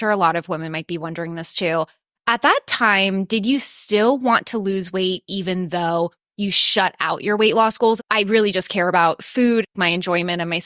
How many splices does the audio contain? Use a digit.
1